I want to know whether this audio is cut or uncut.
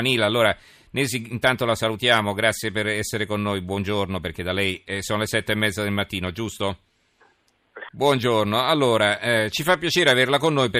cut